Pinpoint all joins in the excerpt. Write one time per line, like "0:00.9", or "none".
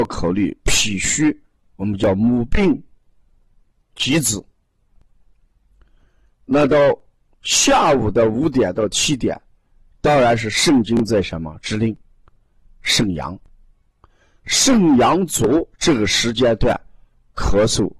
0:12.7
0:15.7